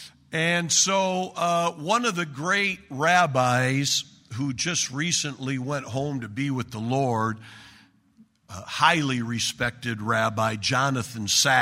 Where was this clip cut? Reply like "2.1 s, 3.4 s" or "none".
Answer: none